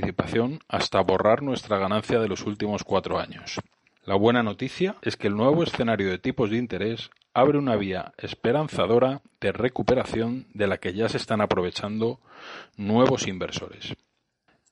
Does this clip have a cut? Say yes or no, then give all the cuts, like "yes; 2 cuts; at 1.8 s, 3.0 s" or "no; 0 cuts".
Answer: yes; 2 cuts; at 3.9 s, 5.0 s